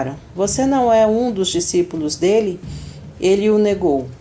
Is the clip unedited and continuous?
yes; 0 cuts

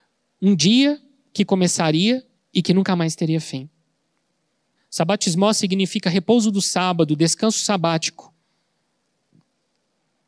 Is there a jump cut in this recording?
yes; 2 cuts; at 2.3 s, 4.8 s

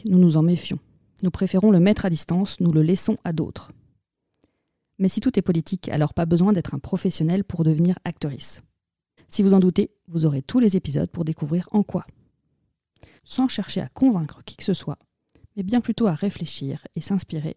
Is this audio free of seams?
no; 2 cuts; at 9.2 s, 13.2 s

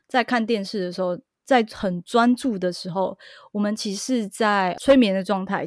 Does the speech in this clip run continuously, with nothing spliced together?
yes; 0 cuts

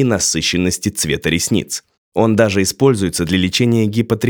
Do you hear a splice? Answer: no; 0 cuts

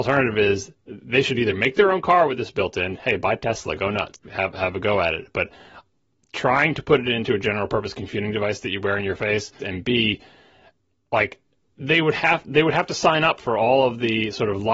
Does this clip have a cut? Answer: yes; 2 cuts; at 4.2 s, 9.6 s

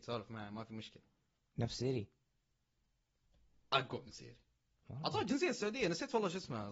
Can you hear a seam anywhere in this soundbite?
no; 0 cuts

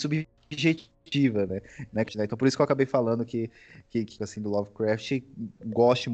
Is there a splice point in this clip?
yes; 2 cuts; at 2.1 s, 4.2 s

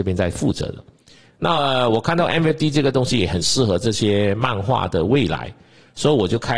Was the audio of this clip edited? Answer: no; 0 cuts

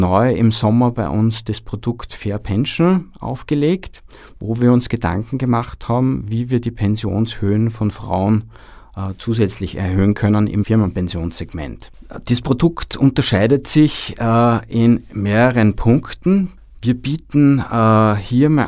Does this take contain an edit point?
no; 0 cuts

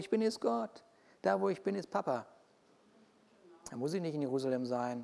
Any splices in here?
no; 0 cuts

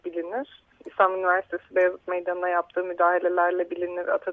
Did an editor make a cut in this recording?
no; 0 cuts

